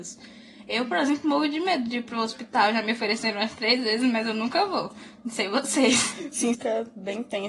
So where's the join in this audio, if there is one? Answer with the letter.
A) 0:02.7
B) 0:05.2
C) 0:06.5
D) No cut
C